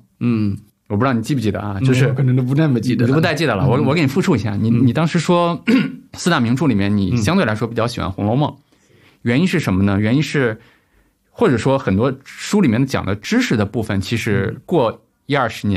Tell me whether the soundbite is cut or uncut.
uncut